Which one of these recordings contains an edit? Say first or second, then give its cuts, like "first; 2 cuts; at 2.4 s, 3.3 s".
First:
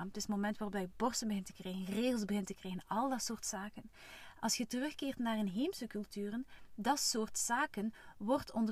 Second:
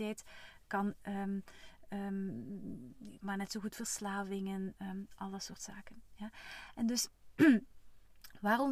second; 1 cut; at 3.2 s